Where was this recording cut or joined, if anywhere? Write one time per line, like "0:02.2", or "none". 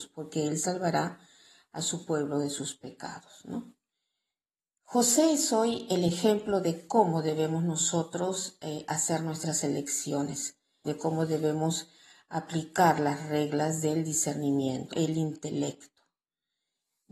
0:10.8
0:14.9